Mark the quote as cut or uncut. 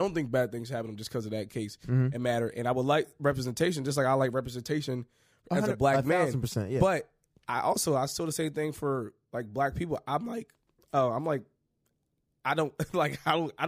uncut